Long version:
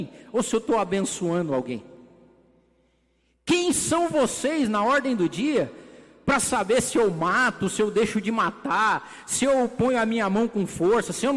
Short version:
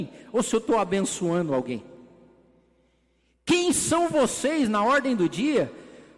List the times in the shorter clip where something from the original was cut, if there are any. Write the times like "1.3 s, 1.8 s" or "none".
none